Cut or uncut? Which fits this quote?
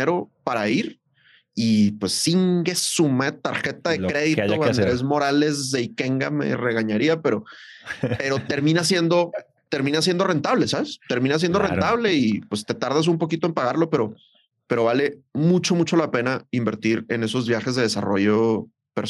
uncut